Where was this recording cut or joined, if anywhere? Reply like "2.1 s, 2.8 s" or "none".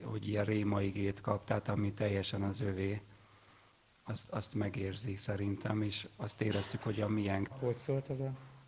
7.5 s